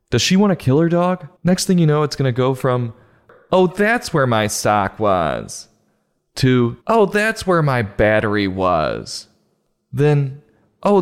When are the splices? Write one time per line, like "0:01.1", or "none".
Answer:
0:01.4
0:06.8